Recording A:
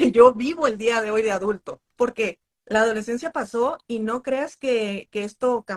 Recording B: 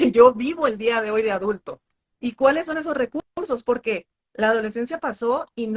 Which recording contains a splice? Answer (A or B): A